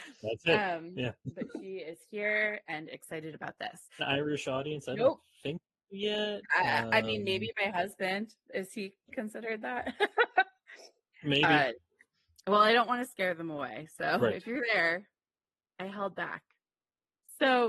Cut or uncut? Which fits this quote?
cut